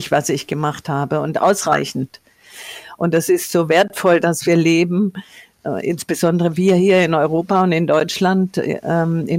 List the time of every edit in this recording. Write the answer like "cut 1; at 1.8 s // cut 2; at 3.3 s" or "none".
none